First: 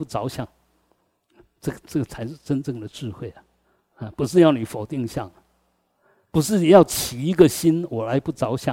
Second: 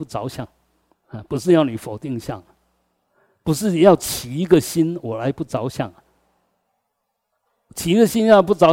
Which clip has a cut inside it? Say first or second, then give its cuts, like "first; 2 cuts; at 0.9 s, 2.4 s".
second; 1 cut; at 0.9 s